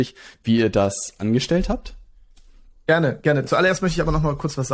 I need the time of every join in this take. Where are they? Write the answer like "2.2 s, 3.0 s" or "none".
none

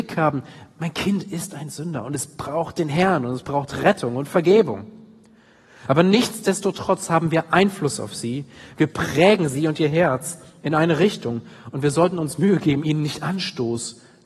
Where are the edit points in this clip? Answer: none

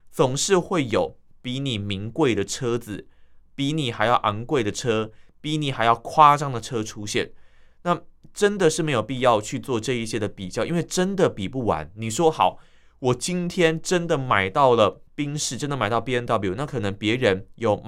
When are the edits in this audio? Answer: none

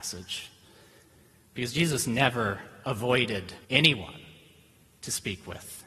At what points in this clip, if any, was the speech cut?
3.6 s

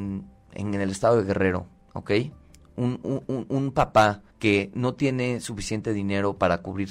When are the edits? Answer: 3.0 s, 4.3 s

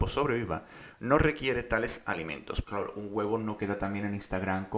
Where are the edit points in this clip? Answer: 2.6 s

